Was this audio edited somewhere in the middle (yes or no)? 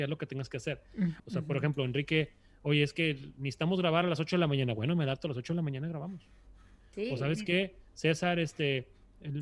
yes